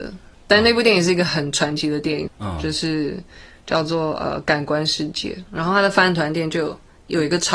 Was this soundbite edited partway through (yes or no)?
yes